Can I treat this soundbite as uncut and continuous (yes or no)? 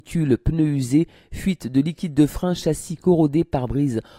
yes